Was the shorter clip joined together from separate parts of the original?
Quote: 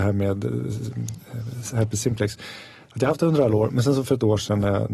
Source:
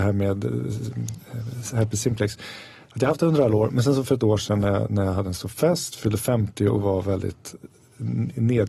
no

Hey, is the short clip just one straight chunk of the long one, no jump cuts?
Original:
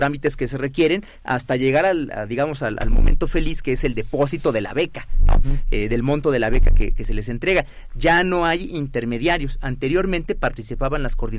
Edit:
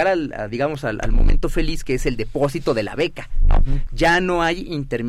no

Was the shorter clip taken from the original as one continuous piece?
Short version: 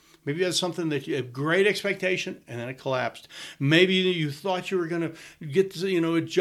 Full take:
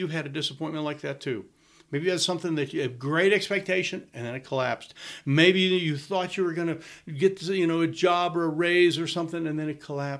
yes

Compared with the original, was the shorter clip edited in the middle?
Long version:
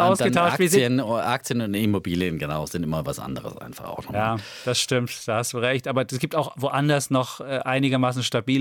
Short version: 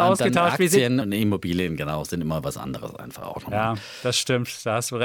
yes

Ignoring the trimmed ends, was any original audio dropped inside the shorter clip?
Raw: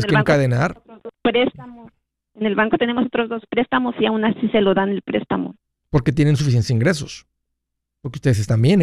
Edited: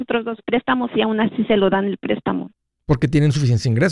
no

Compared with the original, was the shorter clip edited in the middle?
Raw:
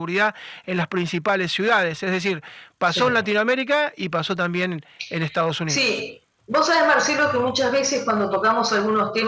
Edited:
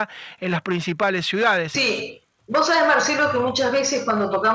yes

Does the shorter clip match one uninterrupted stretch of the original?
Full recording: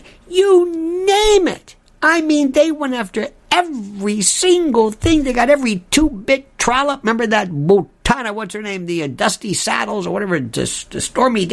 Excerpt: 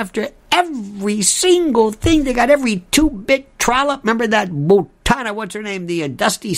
yes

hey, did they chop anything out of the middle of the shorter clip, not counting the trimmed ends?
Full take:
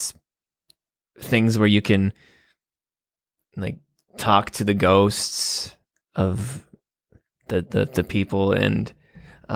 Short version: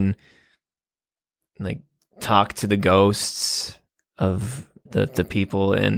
yes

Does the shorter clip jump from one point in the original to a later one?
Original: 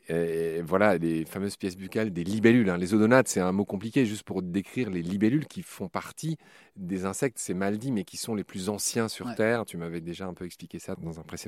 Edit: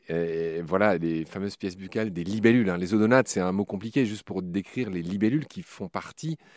no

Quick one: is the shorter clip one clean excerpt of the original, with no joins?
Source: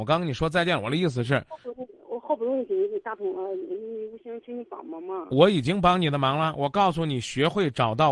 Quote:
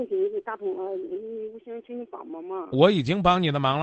yes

